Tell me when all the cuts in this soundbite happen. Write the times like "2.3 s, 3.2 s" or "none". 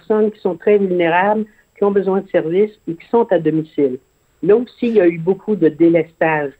none